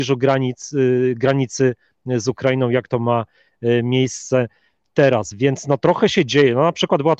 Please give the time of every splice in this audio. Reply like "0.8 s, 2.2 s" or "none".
none